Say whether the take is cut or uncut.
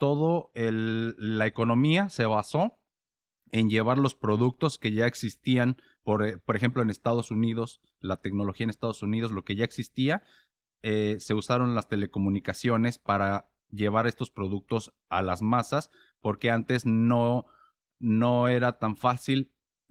uncut